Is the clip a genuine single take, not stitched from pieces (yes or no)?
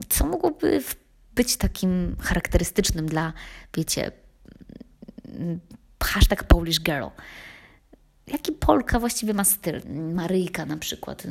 no